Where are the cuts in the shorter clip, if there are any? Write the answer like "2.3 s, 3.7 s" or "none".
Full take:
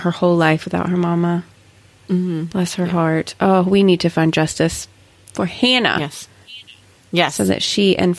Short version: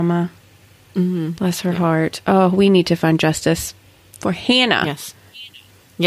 none